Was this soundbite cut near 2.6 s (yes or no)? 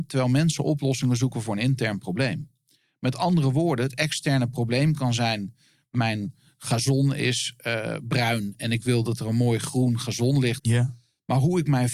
no